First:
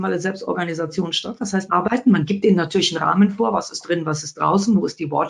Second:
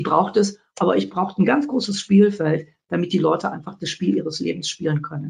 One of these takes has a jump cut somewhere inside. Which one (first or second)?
first